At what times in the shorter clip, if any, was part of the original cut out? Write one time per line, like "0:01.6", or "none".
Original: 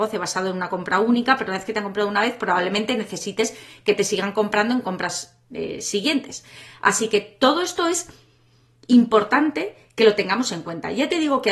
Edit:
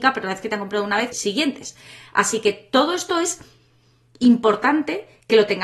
0:01.1